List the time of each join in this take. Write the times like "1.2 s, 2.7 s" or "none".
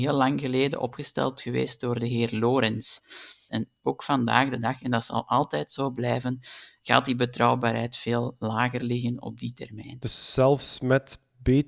3.5 s